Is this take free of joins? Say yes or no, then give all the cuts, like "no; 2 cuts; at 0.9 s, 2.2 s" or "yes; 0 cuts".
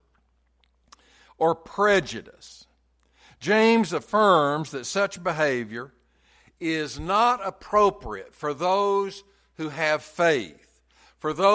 yes; 0 cuts